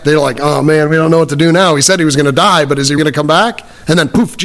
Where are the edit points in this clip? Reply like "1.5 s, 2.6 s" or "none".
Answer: 3.0 s